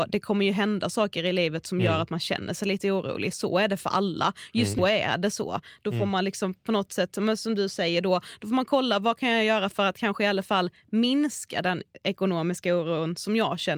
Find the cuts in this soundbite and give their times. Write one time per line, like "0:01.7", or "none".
0:04.8